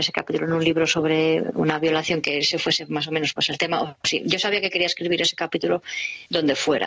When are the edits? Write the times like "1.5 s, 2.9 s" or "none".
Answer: none